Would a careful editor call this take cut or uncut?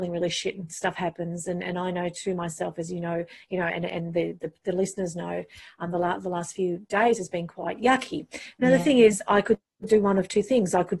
uncut